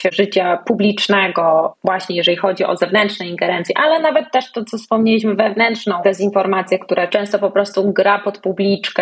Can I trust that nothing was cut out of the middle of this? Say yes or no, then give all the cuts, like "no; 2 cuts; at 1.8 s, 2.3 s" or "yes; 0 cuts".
yes; 0 cuts